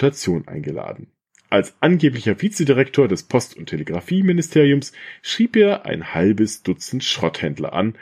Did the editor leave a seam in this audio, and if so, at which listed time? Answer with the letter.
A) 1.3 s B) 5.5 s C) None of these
A